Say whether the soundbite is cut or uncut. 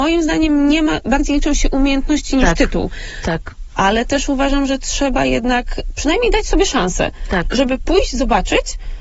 uncut